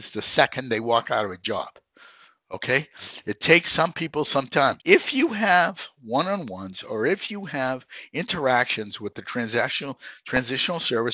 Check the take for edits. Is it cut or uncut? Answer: cut